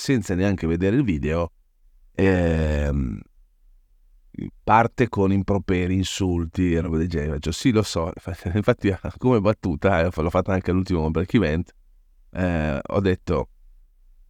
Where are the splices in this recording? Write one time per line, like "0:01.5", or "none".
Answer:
none